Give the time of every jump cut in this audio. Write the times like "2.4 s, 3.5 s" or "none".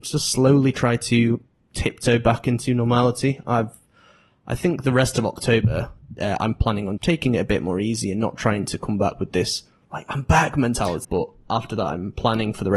7.0 s, 11.0 s